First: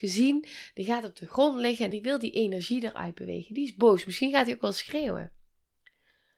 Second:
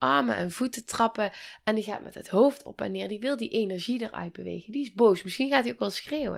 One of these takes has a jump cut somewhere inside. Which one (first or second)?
first